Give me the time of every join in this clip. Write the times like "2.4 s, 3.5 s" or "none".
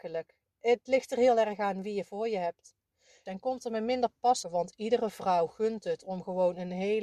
3.3 s, 4.4 s